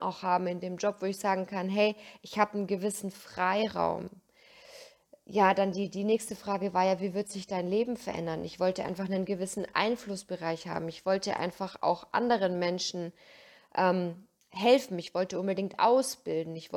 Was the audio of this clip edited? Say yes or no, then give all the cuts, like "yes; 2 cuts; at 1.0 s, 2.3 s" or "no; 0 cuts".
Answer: no; 0 cuts